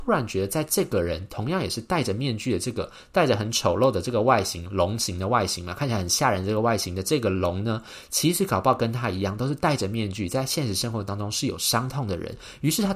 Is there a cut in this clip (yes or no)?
no